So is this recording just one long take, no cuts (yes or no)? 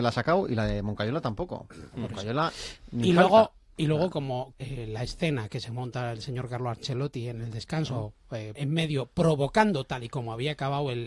no